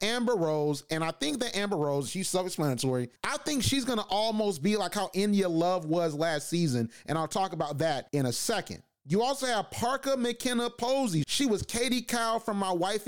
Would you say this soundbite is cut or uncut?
cut